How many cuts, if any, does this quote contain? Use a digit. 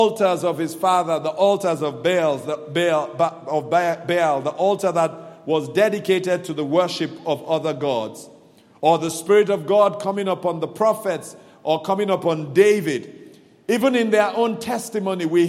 0